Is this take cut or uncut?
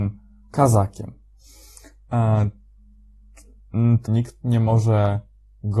cut